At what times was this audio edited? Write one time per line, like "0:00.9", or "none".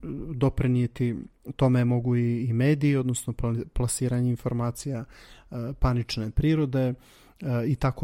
none